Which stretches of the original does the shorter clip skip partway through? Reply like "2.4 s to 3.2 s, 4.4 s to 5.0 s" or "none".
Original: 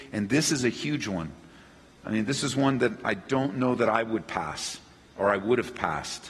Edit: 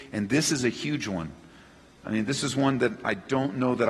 none